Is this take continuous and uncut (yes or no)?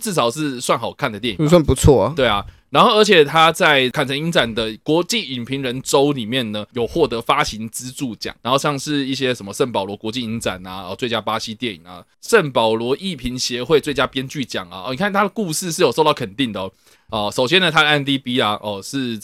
no